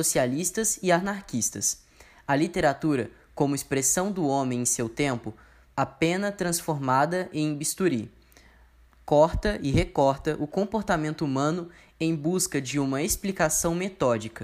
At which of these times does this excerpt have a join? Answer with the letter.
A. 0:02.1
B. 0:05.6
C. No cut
B